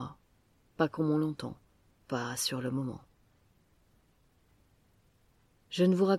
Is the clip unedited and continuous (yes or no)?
yes